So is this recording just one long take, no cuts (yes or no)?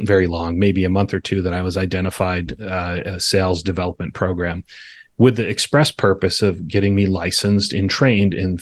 no